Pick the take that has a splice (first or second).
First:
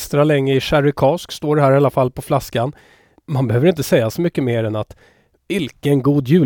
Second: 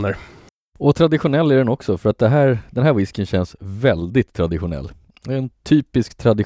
first